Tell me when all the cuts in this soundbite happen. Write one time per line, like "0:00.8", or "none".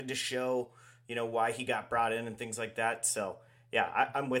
none